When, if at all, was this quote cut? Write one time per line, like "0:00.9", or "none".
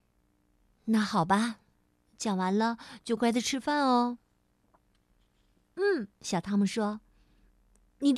0:03.2
0:06.2